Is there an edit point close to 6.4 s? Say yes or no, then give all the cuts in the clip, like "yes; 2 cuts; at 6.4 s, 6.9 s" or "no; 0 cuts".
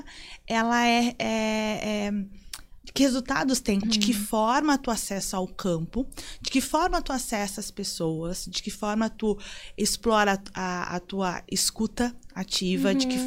no; 1 cut; at 3.8 s